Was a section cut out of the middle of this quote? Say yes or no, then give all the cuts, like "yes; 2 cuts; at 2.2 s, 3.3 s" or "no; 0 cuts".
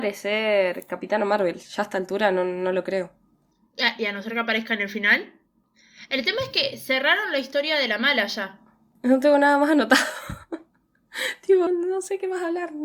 yes; 2 cuts; at 9.0 s, 11.7 s